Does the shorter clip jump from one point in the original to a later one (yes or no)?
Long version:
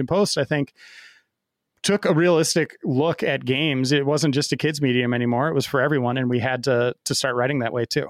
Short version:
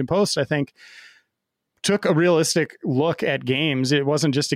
no